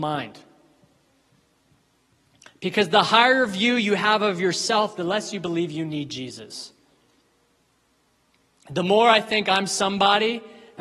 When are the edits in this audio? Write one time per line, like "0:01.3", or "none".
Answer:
none